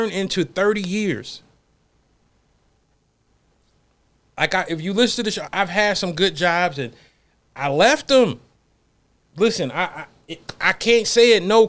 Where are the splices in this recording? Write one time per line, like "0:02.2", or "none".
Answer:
0:05.5
0:09.3